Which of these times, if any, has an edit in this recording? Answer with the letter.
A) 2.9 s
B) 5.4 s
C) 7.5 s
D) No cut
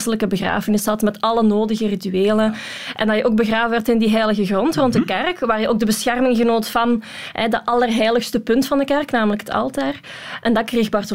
D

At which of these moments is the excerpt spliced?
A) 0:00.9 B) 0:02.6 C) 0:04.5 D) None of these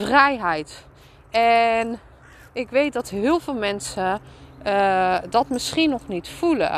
D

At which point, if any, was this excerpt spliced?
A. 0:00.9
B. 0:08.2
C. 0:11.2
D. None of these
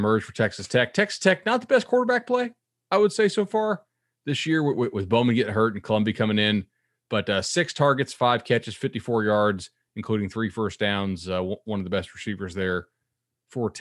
D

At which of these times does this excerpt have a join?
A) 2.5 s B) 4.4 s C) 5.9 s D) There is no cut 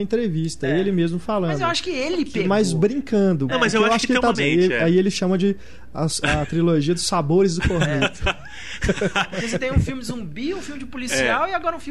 B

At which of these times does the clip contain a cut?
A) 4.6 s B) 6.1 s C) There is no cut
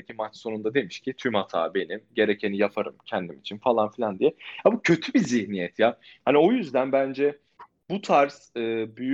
C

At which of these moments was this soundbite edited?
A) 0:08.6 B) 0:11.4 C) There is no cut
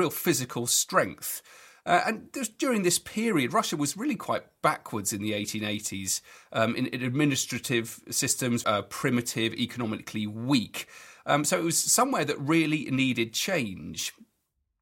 A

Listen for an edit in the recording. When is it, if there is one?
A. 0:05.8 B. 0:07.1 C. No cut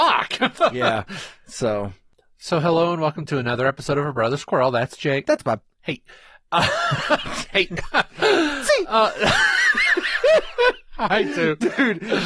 B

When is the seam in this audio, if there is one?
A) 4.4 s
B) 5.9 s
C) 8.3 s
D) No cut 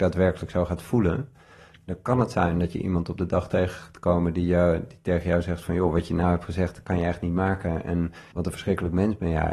C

